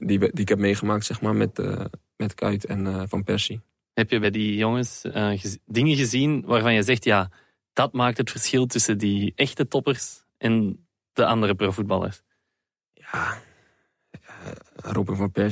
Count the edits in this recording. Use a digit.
0